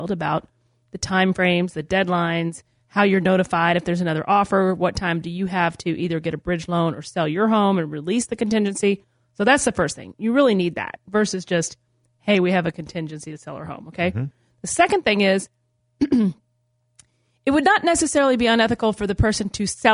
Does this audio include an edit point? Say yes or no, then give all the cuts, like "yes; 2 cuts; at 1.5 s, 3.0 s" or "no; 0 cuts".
no; 0 cuts